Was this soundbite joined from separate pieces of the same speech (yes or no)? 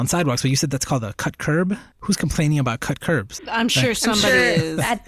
yes